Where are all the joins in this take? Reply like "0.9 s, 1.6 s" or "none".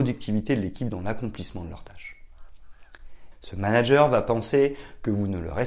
3.3 s